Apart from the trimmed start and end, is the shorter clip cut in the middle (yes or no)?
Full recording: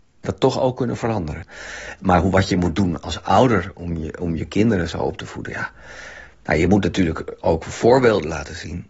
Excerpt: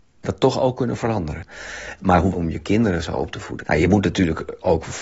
yes